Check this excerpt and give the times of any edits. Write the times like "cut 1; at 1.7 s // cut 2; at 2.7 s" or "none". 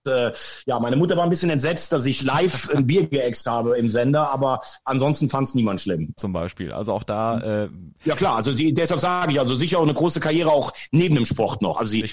cut 1; at 6.2 s